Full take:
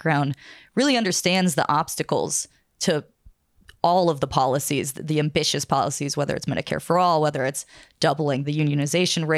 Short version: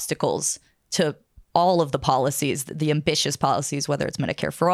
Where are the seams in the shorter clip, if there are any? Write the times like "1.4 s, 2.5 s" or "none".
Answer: 1.5 s